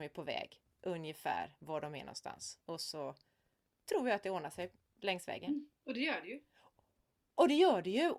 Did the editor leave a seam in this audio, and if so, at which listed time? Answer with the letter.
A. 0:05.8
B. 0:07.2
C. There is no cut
A